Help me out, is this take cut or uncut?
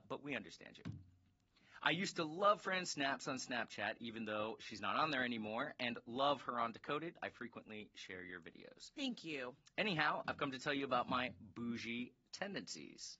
uncut